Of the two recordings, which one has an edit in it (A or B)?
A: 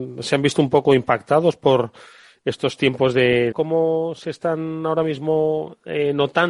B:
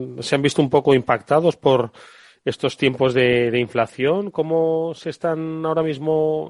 A